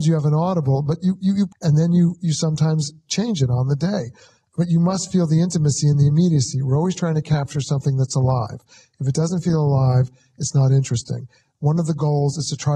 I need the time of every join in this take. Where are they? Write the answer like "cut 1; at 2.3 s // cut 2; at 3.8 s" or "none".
cut 1; at 1.5 s